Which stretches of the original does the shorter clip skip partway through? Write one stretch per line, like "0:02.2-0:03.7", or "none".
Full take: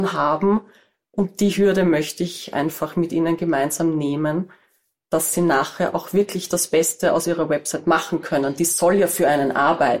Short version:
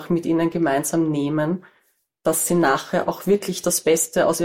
none